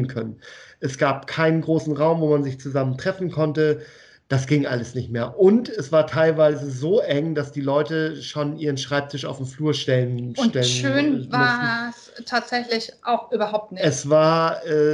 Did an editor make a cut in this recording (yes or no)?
no